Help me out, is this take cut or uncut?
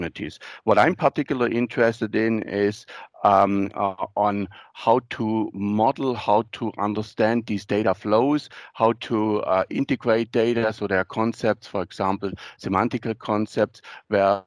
uncut